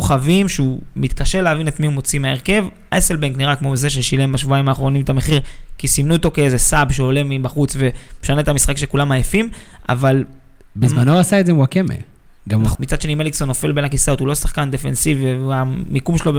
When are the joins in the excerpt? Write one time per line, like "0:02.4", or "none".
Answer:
0:12.7